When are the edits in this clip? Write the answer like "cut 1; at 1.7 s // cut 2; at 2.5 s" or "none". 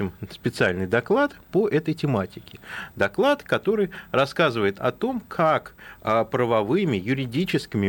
none

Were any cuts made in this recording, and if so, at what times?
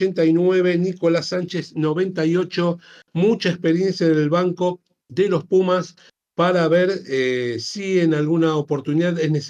none

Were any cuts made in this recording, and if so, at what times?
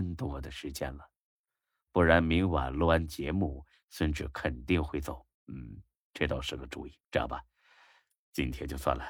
cut 1; at 5.4 s // cut 2; at 7.0 s

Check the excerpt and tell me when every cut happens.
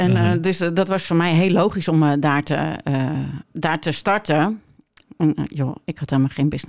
cut 1; at 5.1 s

